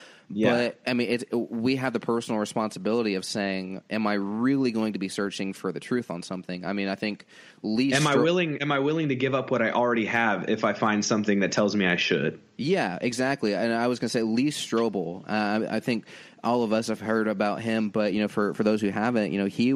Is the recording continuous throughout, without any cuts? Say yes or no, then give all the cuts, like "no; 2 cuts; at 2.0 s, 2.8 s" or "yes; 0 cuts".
yes; 0 cuts